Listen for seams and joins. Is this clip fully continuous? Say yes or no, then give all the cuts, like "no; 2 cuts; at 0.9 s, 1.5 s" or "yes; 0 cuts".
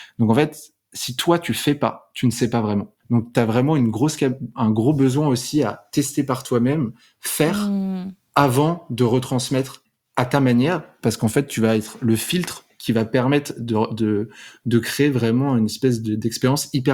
no; 1 cut; at 3.0 s